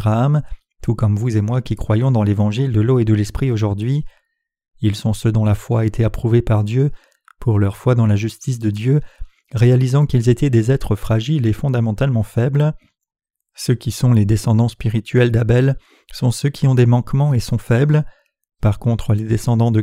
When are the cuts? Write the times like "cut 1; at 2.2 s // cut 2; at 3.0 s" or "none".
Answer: none